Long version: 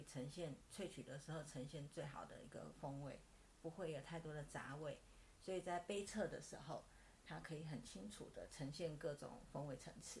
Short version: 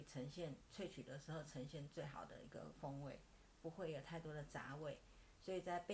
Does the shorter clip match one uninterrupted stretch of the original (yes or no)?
yes